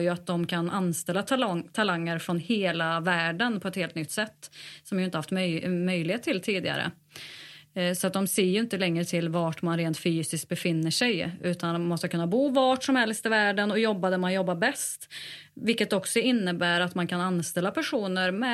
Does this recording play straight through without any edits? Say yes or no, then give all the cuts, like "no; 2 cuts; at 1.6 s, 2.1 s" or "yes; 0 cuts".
yes; 0 cuts